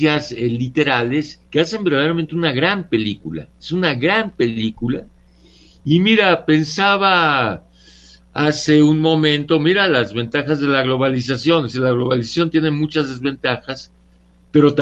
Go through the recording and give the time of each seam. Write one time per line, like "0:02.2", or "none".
0:01.5